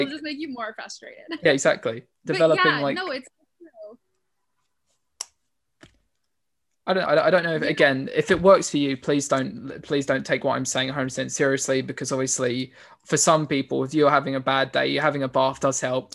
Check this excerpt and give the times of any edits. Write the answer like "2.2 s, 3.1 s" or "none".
7.1 s